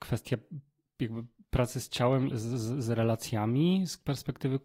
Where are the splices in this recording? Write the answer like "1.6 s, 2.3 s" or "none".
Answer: 2.3 s